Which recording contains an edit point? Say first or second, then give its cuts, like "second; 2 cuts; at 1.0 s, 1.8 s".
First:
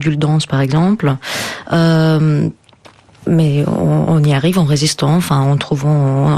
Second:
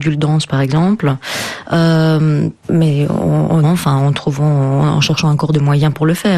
second; 2 cuts; at 2.6 s, 3.6 s